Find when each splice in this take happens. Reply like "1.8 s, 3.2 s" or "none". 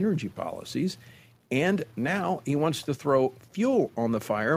none